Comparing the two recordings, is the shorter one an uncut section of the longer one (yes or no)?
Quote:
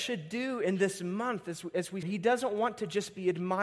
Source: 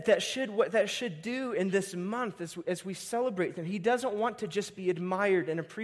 no